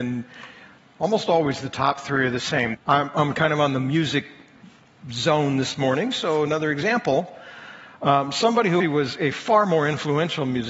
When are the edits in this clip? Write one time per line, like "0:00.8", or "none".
0:02.7
0:08.8